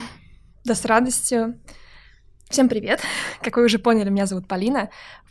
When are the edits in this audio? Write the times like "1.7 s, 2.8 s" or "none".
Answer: none